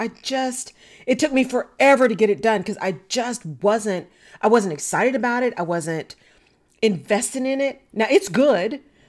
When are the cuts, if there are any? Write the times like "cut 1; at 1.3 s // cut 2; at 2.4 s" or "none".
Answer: none